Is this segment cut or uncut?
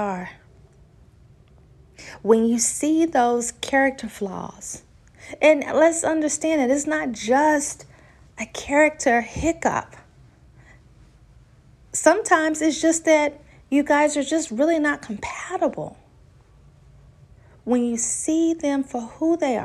uncut